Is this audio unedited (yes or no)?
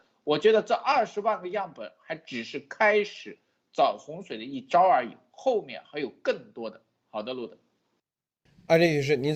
yes